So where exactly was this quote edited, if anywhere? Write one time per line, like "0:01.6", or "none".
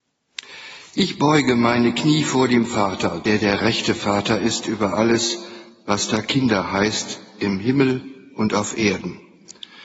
none